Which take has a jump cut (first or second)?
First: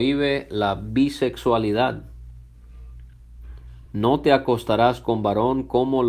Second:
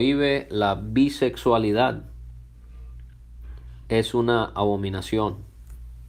second